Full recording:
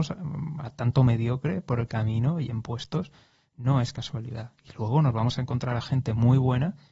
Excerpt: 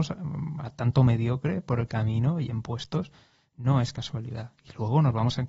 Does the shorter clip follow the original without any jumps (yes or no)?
yes